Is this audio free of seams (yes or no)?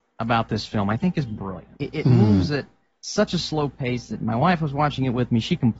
no